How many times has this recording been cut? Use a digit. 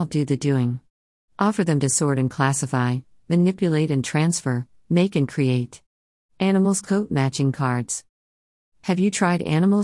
1